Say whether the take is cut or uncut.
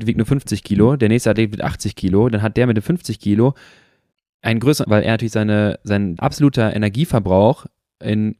cut